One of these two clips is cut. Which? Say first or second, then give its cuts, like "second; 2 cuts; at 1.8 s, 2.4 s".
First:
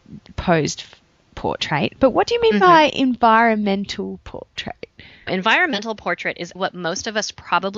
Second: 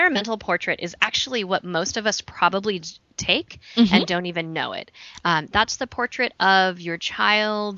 first; 2 cuts; at 5.3 s, 6.6 s